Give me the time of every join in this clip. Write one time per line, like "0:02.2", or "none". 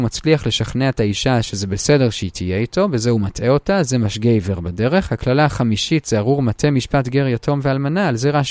none